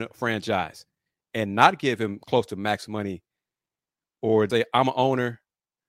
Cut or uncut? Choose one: cut